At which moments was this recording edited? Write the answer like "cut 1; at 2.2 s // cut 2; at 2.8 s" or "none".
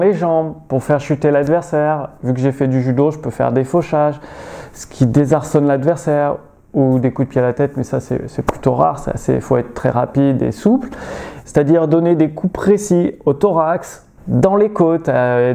cut 1; at 11.4 s // cut 2; at 14.2 s